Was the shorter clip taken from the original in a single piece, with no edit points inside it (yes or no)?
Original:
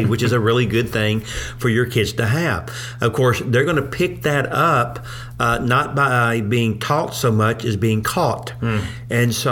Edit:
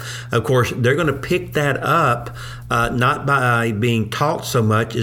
yes